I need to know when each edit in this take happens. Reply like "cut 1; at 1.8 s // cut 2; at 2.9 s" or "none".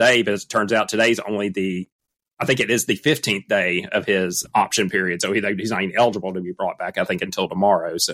cut 1; at 4.4 s